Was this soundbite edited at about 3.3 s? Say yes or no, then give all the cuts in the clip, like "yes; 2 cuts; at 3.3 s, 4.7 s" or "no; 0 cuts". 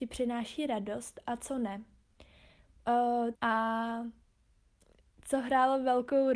yes; 1 cut; at 3.3 s